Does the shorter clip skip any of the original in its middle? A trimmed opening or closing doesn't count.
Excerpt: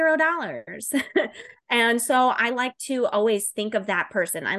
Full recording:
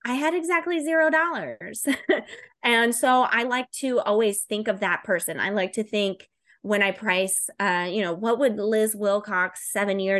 no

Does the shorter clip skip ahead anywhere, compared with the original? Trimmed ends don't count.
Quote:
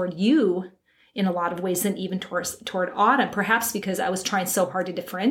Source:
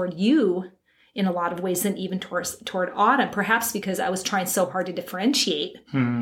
no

